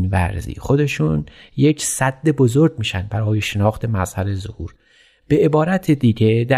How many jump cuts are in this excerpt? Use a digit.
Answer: 0